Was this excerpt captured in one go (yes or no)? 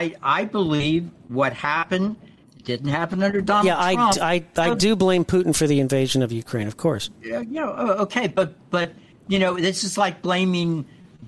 no